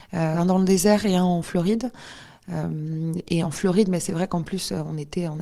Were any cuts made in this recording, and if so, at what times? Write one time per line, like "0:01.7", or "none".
none